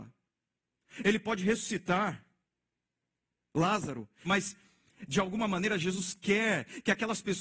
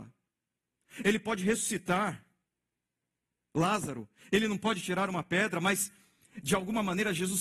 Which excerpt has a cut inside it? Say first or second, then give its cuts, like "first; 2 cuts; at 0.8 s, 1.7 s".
first; 1 cut; at 4.2 s